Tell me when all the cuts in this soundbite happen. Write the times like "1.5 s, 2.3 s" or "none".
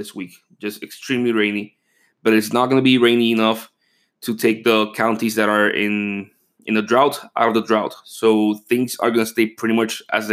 none

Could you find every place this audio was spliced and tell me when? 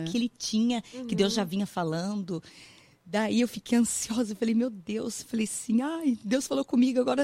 none

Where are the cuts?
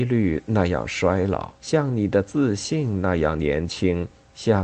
1.6 s

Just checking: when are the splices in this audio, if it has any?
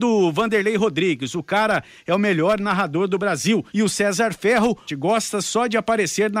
3.7 s, 4.9 s

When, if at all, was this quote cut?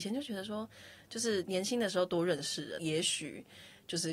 2.8 s

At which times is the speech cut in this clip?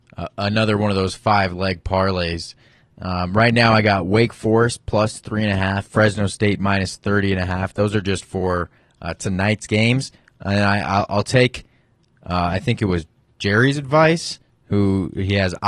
none

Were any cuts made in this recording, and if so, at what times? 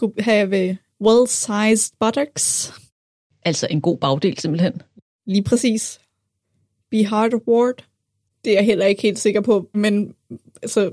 8.3 s, 9.7 s

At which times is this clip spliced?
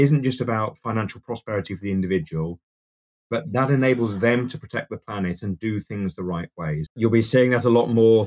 6.9 s

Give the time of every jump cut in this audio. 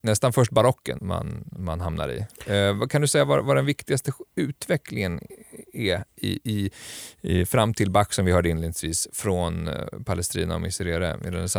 1.0 s

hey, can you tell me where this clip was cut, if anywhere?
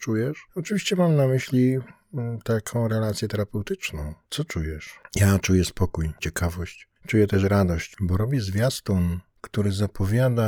none

